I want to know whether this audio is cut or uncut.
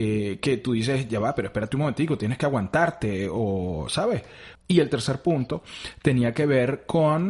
cut